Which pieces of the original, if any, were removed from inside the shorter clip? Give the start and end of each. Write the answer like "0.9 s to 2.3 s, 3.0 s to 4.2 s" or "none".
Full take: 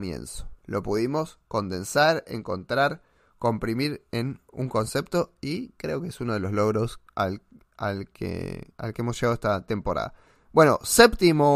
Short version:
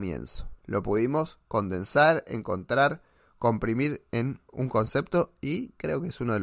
none